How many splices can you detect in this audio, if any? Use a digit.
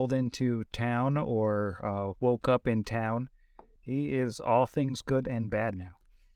1